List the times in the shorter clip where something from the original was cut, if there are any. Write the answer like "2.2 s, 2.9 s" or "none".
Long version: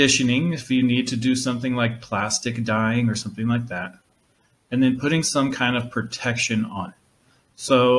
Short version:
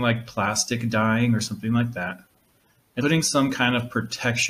3.0 s